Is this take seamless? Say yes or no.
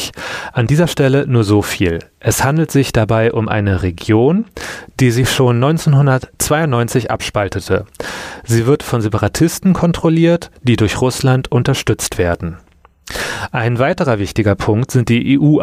yes